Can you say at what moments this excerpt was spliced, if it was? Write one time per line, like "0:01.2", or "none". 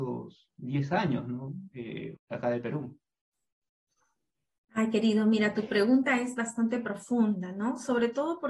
0:02.2